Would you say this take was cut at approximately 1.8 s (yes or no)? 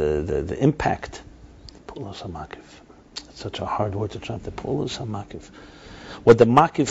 yes